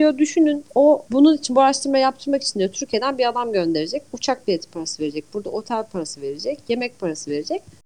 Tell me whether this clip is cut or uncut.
uncut